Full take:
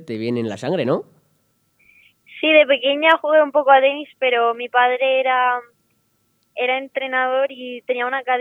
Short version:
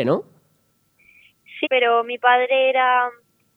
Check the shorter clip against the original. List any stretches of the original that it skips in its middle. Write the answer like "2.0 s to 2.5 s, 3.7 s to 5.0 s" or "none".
2.4 s to 4.1 s